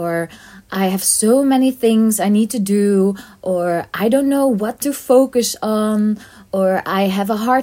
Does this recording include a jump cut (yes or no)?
no